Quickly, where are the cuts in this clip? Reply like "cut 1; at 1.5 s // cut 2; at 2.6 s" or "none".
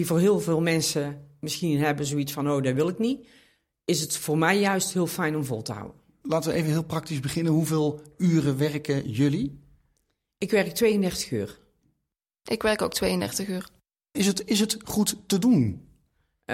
cut 1; at 6.2 s

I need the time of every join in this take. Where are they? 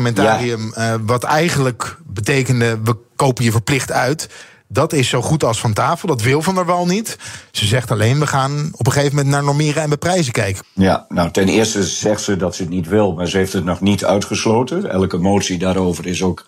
cut 1; at 10.6 s

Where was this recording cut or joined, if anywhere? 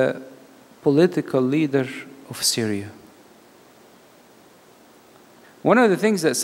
cut 1; at 5.4 s

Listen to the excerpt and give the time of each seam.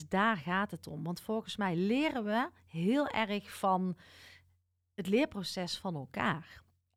none

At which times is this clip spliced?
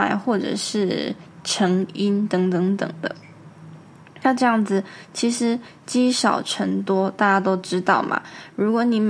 none

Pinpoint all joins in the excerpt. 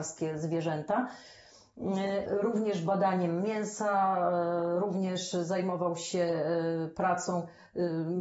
cut 1; at 2.3 s

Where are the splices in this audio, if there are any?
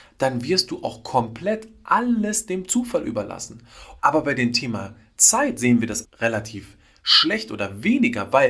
cut 1; at 4.0 s // cut 2; at 6.0 s

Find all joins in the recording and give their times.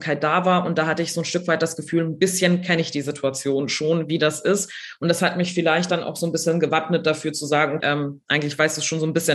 cut 1; at 7.8 s

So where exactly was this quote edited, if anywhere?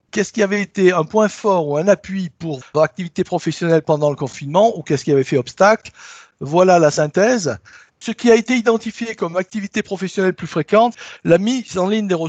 cut 1; at 2.6 s // cut 2; at 7.9 s // cut 3; at 11.2 s

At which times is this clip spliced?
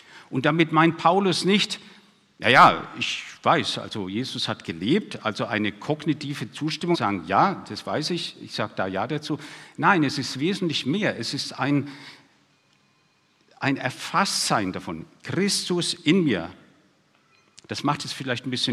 cut 1; at 6.9 s

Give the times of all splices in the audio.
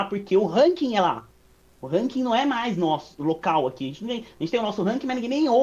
none

